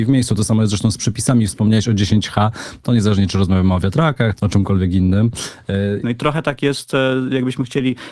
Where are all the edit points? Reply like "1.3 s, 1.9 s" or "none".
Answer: 2.8 s, 4.3 s, 6.0 s